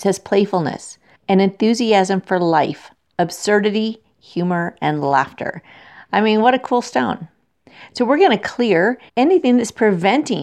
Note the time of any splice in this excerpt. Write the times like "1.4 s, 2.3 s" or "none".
1.1 s, 9.1 s